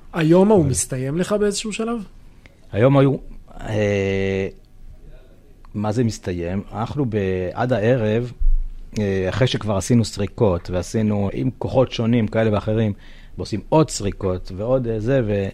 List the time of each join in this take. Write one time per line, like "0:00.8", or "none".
0:11.3
0:13.3